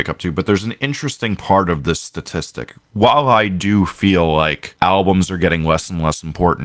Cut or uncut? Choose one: uncut